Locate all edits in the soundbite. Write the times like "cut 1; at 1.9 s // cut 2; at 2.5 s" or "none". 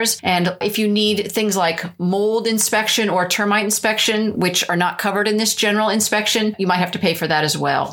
none